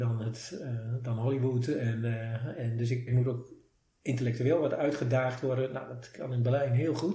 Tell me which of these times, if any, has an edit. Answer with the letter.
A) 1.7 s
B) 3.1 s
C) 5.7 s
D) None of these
B